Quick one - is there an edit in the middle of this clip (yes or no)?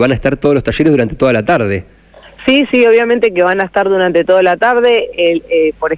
no